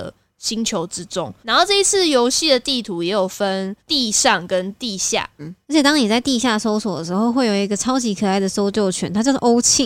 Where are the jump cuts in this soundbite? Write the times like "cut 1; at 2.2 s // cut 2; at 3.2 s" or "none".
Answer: cut 1; at 3.8 s // cut 2; at 5.4 s